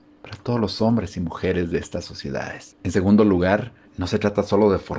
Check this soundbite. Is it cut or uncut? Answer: cut